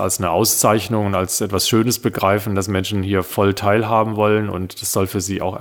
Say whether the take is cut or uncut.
uncut